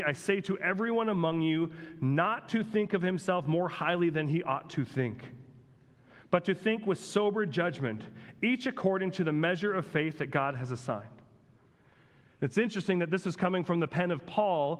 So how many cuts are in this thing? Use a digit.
0